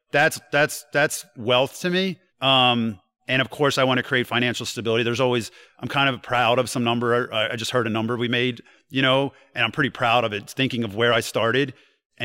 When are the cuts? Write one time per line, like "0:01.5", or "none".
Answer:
0:02.3